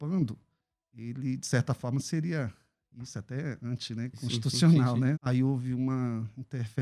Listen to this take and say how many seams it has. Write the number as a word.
one